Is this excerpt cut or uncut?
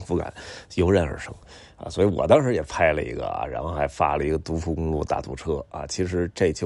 uncut